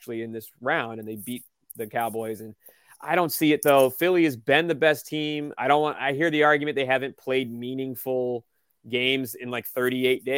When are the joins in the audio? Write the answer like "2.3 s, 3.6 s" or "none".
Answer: none